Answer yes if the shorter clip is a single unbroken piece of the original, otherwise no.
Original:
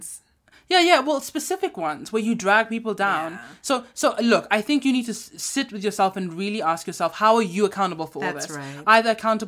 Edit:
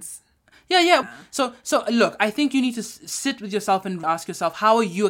no